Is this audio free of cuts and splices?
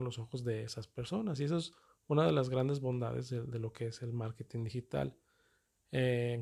yes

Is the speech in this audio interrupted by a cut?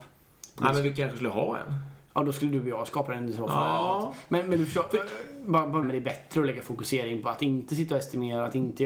yes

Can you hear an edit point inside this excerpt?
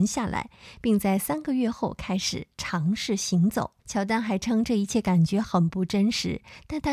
yes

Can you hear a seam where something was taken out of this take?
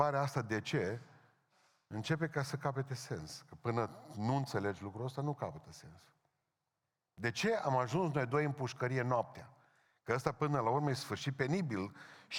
no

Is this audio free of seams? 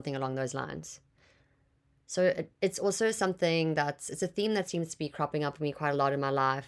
yes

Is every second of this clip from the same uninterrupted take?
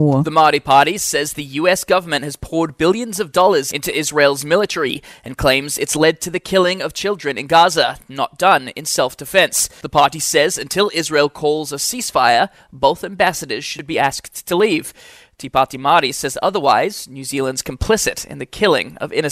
yes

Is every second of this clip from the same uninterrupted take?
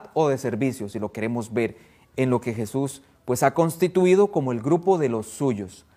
yes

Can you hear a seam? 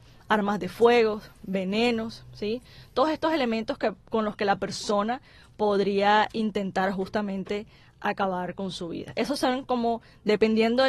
no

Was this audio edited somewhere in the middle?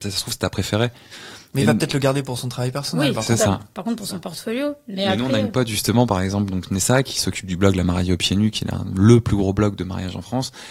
no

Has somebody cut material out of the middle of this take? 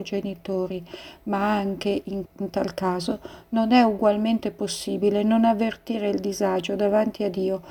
yes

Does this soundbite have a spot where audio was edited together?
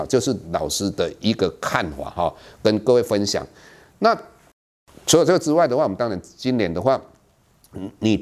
no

